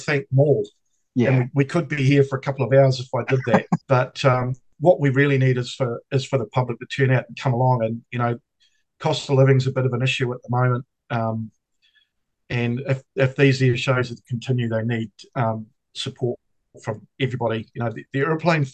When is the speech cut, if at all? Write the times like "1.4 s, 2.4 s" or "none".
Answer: 3.8 s